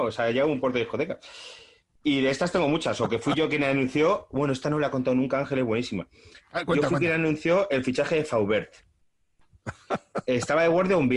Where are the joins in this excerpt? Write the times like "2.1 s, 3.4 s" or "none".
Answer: none